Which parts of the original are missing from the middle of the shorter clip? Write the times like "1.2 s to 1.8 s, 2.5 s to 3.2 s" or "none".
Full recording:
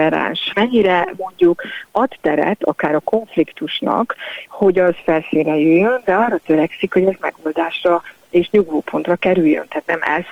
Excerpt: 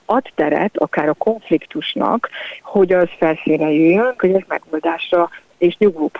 6.0 s to 6.9 s